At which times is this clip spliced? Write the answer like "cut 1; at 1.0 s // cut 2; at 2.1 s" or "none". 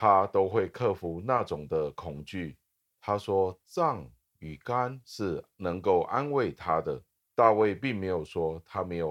cut 1; at 2.9 s // cut 2; at 7.2 s